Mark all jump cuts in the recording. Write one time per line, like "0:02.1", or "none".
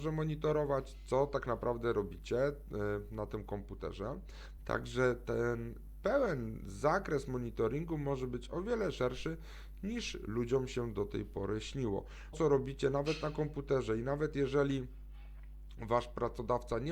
0:04.6
0:12.3